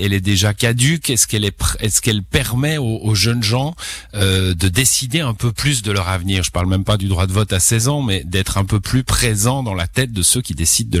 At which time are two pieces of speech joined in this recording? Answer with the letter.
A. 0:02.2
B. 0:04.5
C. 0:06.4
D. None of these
D